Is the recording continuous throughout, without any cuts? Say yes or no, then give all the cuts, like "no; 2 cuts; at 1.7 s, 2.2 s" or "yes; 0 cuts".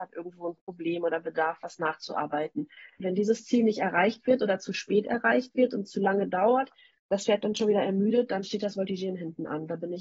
no; 1 cut; at 3.0 s